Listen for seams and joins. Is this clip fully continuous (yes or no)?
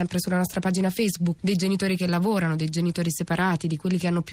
no